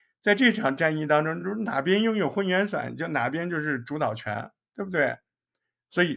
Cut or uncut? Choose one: uncut